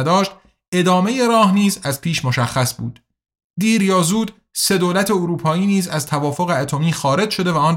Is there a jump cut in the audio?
no; 0 cuts

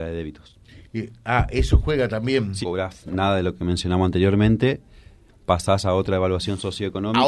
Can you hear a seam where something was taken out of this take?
yes; 1 cut; at 2.6 s

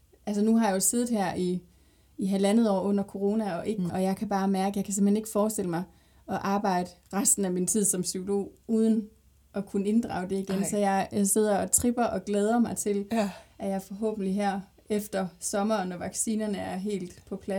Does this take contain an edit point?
yes; 1 cut; at 3.9 s

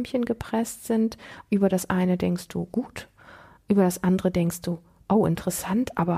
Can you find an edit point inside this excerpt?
yes; 1 cut; at 1.5 s

